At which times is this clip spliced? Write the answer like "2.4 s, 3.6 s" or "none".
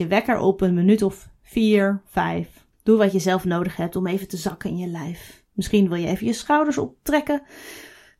2.7 s